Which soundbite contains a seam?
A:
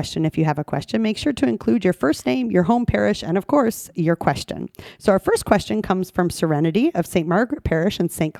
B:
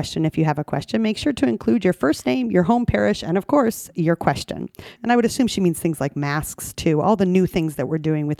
B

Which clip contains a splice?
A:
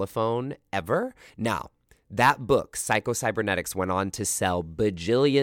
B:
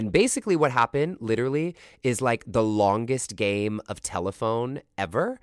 A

